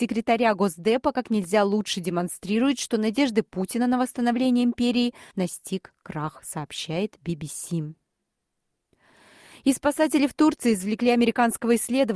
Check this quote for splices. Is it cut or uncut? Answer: cut